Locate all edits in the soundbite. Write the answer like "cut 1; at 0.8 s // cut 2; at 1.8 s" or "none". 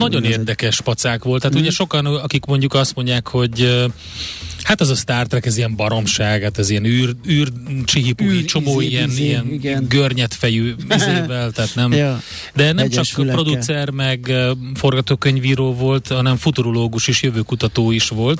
none